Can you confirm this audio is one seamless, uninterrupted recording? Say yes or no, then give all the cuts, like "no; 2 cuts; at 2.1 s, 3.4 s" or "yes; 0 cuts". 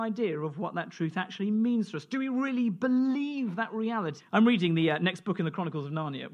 no; 1 cut; at 4.2 s